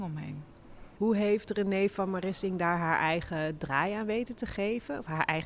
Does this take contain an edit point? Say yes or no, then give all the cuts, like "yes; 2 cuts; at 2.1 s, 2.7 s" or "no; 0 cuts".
yes; 1 cut; at 0.9 s